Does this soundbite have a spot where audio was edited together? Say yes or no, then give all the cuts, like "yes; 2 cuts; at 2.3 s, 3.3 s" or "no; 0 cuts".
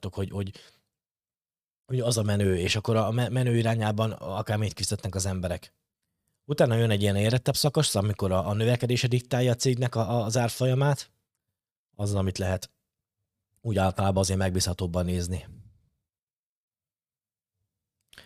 yes; 1 cut; at 11.9 s